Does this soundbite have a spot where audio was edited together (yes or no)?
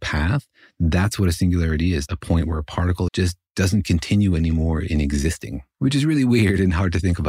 yes